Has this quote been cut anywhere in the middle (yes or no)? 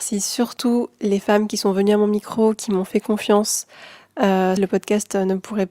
yes